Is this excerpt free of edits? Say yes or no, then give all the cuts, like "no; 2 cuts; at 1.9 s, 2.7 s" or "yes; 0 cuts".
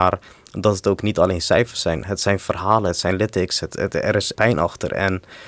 no; 1 cut; at 4.3 s